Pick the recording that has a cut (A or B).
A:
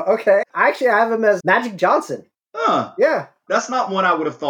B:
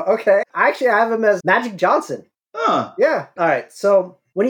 B